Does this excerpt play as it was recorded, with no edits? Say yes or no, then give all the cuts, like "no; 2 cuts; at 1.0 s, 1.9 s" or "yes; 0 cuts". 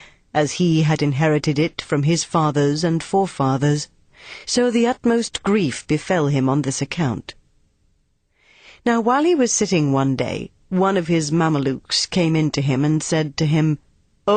yes; 0 cuts